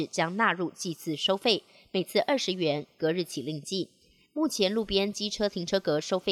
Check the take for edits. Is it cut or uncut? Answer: uncut